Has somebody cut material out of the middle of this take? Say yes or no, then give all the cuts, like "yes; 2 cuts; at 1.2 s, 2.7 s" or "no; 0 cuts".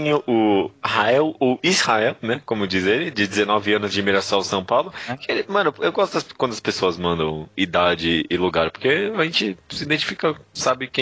no; 0 cuts